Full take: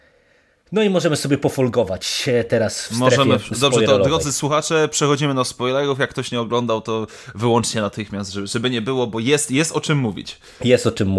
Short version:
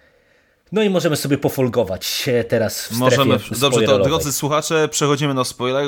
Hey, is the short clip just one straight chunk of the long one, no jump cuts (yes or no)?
yes